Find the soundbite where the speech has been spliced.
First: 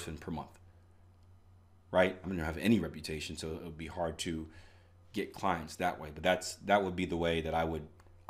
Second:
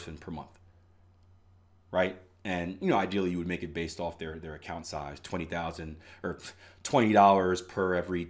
first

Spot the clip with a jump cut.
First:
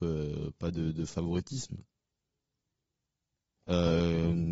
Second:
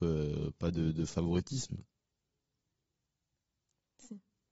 first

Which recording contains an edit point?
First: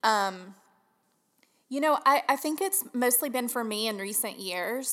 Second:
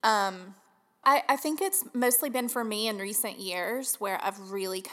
second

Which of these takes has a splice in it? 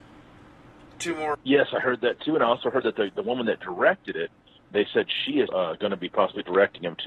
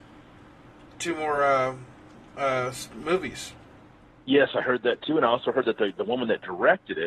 first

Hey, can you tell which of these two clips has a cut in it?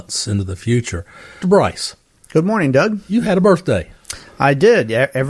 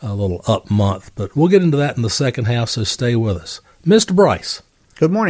first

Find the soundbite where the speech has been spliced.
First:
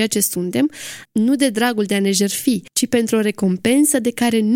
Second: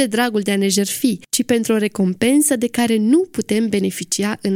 first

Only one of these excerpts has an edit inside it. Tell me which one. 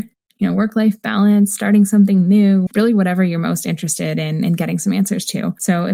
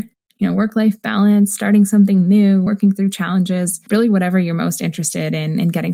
first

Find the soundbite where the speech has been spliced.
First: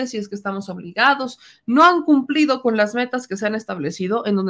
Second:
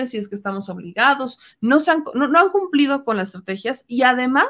second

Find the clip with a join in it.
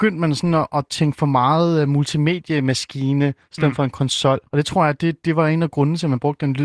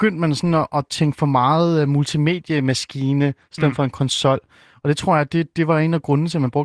first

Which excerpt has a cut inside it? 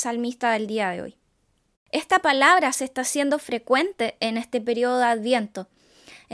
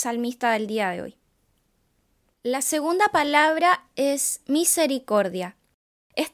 first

